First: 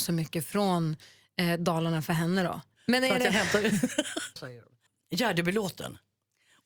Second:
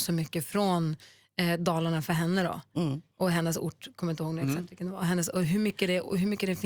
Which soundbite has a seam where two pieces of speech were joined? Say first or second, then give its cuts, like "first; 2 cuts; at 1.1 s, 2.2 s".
first; 2 cuts; at 2.7 s, 4.4 s